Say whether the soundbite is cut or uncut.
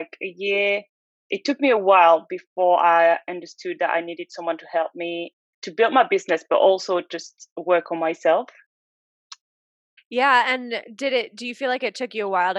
cut